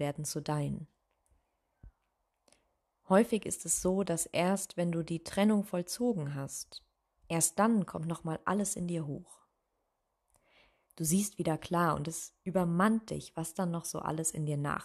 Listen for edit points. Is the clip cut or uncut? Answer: cut